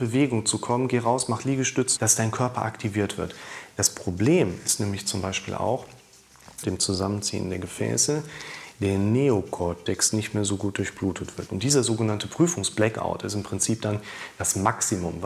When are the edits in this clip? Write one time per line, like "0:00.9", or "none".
0:02.0
0:06.6
0:11.5